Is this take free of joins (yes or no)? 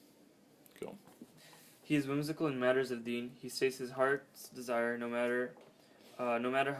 no